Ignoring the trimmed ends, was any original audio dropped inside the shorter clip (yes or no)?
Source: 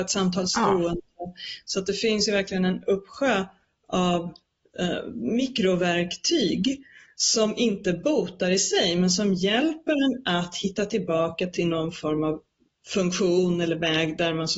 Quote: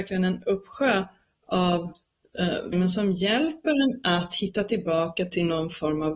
yes